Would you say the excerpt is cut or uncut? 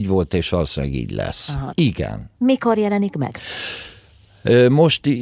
cut